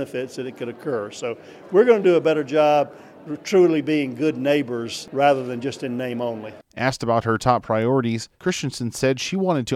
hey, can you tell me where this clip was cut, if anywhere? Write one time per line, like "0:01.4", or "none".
none